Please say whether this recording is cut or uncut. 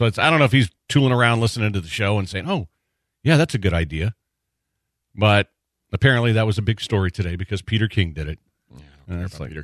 uncut